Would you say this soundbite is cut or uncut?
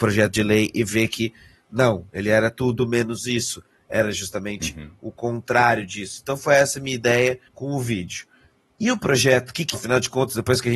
cut